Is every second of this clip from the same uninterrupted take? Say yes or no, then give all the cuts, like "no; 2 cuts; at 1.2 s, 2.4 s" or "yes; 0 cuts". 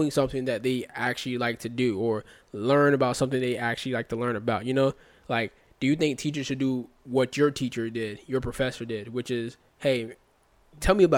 yes; 0 cuts